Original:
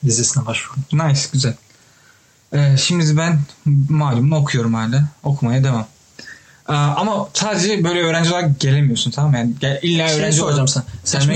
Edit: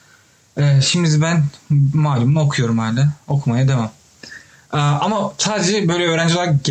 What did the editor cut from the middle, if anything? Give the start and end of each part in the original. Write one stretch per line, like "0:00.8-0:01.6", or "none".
none